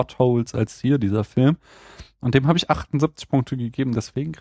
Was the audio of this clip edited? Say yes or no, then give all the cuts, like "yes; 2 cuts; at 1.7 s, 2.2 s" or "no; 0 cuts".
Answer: no; 0 cuts